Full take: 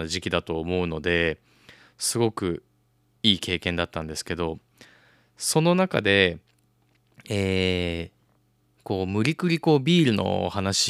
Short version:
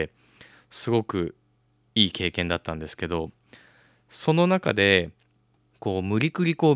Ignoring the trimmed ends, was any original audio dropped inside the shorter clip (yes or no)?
yes